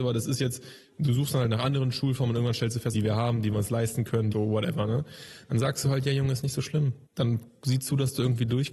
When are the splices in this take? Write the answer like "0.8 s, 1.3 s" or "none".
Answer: 2.9 s, 4.3 s, 7.1 s